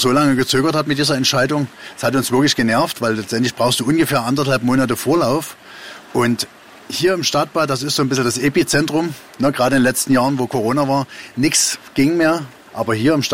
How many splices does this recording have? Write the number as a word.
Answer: one